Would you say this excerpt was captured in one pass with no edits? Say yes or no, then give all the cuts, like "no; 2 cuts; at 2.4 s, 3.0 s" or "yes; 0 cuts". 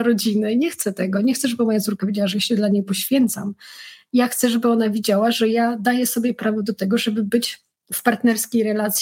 yes; 0 cuts